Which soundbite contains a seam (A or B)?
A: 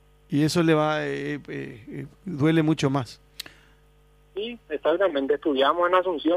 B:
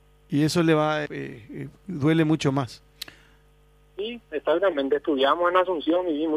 B